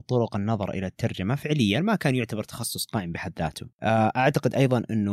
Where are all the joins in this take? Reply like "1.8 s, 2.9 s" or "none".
3.7 s